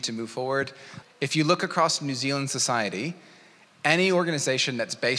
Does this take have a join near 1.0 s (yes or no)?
yes